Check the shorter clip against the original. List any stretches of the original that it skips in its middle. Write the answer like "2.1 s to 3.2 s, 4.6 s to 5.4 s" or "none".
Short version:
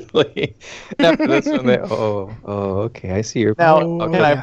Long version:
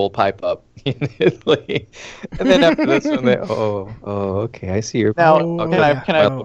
2.3 s to 2.6 s